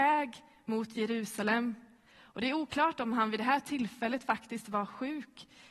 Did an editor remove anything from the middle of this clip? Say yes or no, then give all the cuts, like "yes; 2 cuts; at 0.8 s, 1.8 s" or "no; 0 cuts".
yes; 1 cut; at 2.1 s